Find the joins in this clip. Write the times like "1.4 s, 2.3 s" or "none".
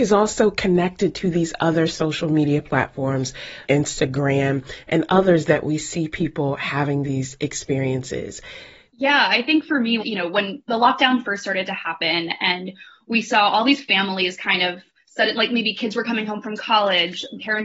3.6 s, 8.9 s, 10.0 s

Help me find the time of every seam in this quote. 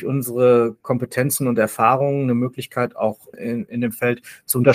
3.3 s

